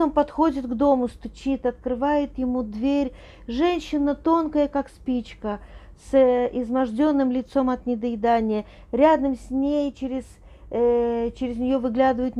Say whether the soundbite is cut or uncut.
uncut